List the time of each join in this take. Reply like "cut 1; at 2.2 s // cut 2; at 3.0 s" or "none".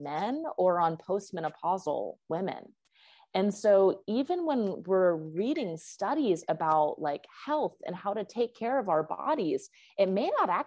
none

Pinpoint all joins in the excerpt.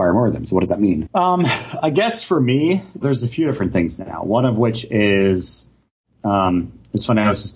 cut 1; at 1.1 s // cut 2; at 3.0 s

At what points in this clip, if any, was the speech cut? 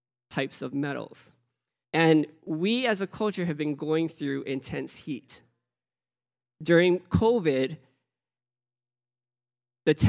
cut 1; at 1.8 s

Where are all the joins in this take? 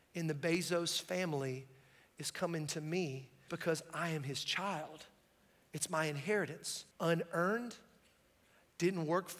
cut 1; at 3.5 s // cut 2; at 6.9 s

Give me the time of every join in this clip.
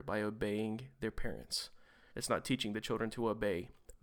cut 1; at 2.1 s

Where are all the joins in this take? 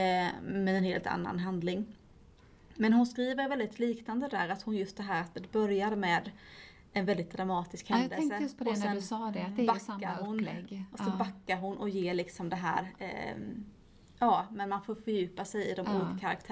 none

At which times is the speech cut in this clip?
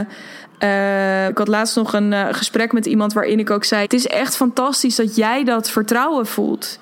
cut 1; at 1.3 s // cut 2; at 3.8 s

